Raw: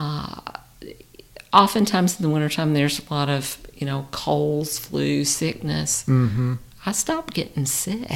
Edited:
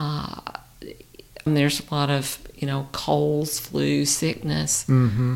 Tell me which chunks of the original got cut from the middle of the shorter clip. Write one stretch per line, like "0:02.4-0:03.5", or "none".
0:01.5-0:02.7